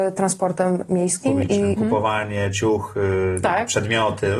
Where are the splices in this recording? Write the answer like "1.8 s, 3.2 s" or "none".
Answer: 1.8 s